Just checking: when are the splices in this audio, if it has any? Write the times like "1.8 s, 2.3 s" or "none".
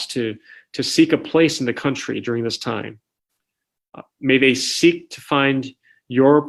none